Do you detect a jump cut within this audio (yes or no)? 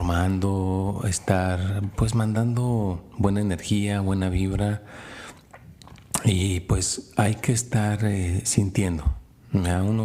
no